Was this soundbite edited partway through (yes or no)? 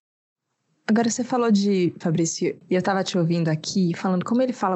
yes